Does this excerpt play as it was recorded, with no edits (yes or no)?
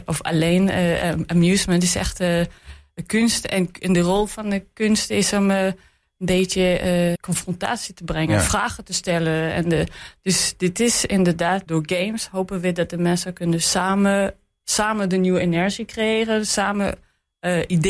no